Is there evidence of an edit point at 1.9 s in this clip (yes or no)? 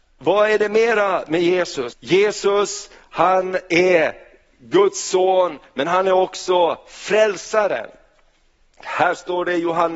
yes